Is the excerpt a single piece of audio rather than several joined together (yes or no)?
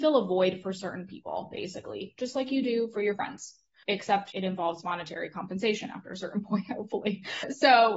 yes